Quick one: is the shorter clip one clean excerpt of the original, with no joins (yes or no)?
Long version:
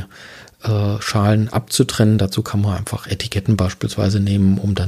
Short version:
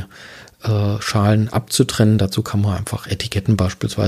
yes